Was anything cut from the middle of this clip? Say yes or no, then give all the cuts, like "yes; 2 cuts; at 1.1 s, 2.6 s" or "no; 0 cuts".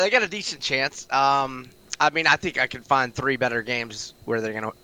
no; 0 cuts